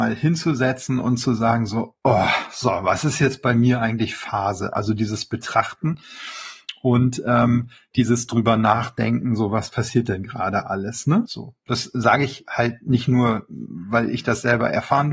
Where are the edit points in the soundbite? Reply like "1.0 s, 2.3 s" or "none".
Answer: 11.2 s